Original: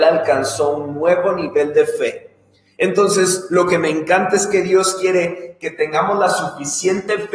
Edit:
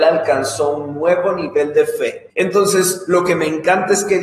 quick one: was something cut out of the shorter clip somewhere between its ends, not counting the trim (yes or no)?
yes